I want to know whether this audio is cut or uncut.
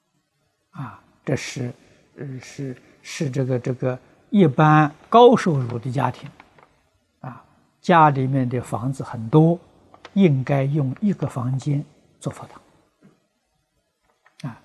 uncut